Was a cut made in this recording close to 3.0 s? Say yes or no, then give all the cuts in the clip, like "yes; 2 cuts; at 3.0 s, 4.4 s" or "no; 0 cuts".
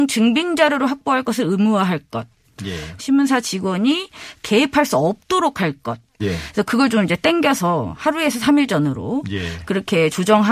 yes; 2 cuts; at 3.0 s, 6.2 s